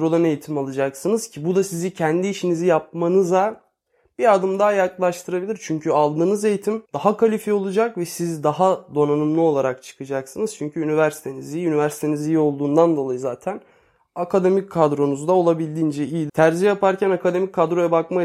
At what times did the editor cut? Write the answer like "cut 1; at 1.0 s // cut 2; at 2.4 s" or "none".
cut 1; at 6.9 s // cut 2; at 16.3 s